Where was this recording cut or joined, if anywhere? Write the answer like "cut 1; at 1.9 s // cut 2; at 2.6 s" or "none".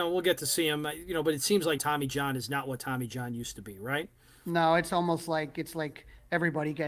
cut 1; at 1.8 s